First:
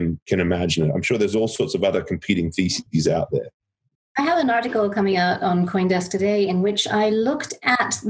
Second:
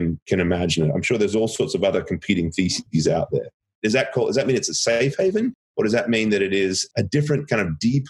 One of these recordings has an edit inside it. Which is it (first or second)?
second